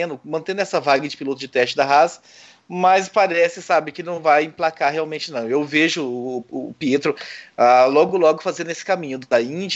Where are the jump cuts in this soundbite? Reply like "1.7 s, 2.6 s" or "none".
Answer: none